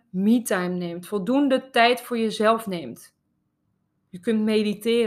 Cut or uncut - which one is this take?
cut